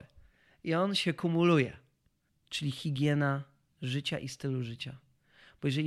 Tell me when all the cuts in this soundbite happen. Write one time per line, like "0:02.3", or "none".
0:02.3